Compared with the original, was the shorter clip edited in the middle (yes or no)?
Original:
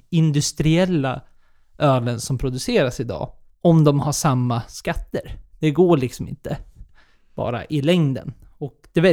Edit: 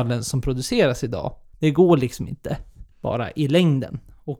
yes